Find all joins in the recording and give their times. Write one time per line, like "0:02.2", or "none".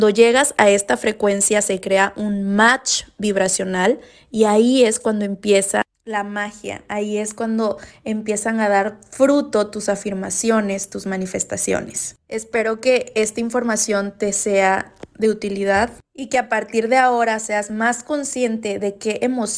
none